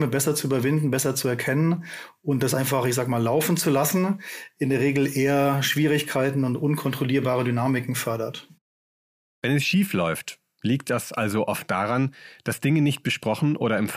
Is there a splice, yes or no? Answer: no